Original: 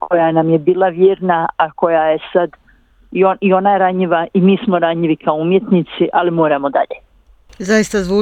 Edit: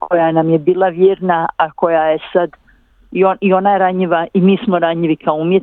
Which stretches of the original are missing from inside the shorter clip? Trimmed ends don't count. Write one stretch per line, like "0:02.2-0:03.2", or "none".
none